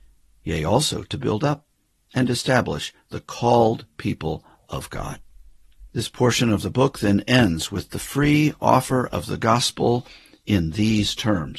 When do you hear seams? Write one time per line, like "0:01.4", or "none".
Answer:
0:05.9